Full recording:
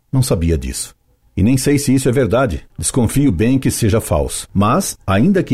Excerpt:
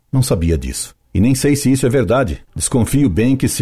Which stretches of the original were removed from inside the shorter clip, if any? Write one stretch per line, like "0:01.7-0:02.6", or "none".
0:01.0-0:01.3